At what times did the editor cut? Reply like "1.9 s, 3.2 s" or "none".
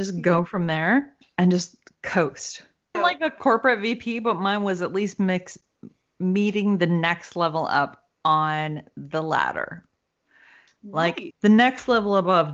2.9 s, 11.3 s